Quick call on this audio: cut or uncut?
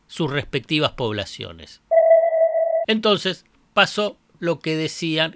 cut